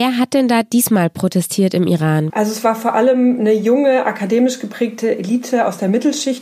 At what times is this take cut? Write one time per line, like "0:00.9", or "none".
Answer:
0:02.3